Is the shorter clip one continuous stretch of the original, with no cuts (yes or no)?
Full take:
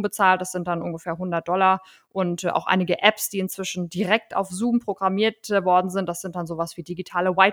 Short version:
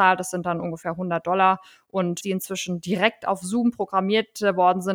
no